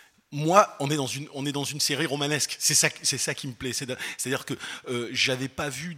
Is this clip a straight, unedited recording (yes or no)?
yes